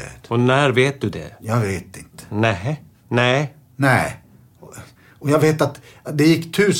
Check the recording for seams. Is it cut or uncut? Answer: cut